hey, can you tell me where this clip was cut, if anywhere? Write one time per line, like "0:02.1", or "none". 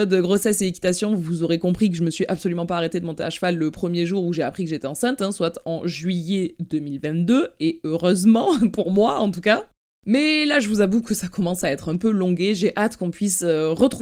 none